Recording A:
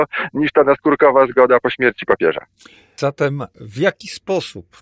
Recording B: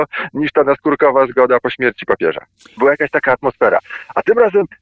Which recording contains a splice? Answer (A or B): B